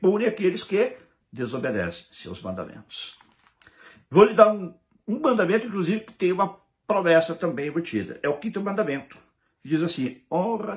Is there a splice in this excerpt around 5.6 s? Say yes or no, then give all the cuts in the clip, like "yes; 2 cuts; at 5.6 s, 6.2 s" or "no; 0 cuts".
no; 0 cuts